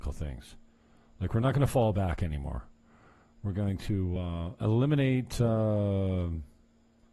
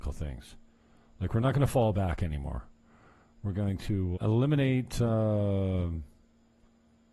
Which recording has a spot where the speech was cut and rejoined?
second; 1 cut; at 4.2 s

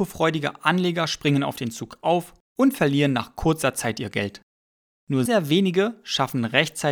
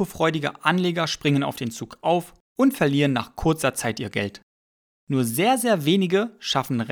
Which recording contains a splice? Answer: first; 1 cut; at 5.3 s

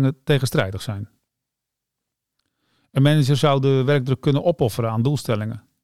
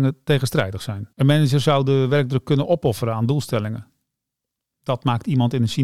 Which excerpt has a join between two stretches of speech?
second; 1 cut; at 1.1 s

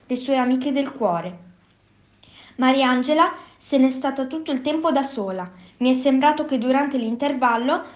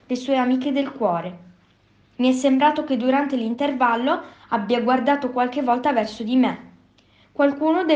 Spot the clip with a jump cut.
second; 1 cut; at 2.2 s

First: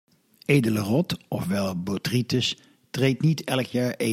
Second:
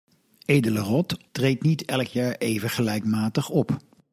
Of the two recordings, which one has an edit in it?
second; 1 cut; at 1.3 s

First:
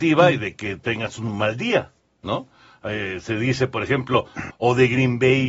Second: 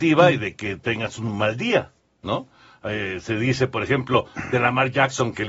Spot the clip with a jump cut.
first; 1 cut; at 4.5 s

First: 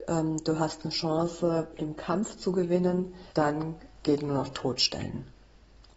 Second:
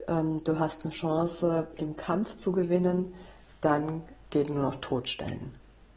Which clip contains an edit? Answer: first; 1 cut; at 3.3 s

